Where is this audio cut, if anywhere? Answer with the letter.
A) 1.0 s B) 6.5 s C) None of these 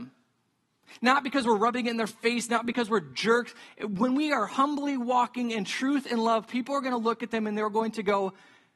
C